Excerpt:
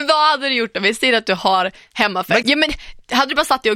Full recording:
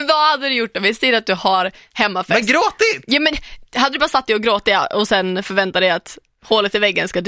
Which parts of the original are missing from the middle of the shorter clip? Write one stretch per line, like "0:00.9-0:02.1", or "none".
0:02.4-0:03.0